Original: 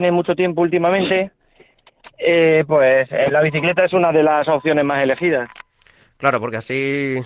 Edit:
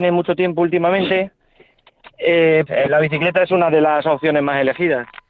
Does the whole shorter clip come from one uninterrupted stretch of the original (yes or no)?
no